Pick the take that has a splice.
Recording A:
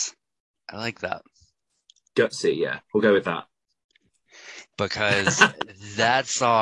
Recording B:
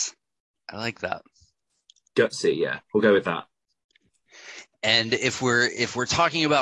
A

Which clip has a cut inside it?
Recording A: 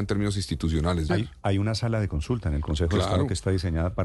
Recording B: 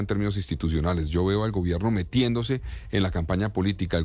A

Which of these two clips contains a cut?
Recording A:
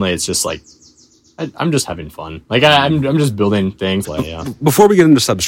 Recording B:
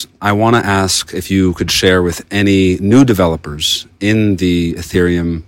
A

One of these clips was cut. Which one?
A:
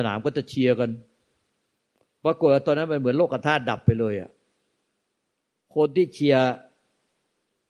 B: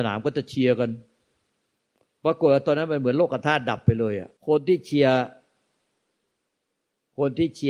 B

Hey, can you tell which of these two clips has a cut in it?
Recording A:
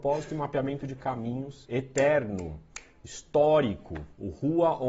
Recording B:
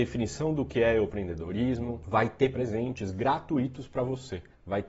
B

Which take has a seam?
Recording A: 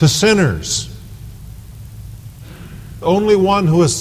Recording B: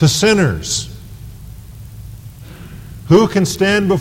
A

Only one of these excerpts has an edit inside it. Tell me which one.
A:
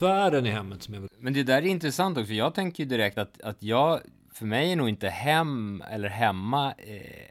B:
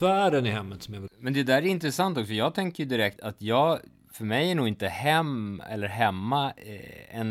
B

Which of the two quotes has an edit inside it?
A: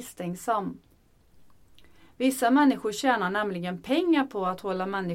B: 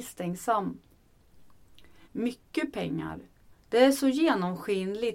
B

